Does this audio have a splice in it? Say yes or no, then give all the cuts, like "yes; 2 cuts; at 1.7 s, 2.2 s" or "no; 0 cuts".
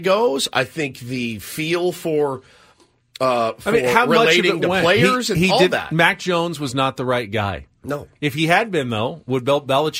no; 0 cuts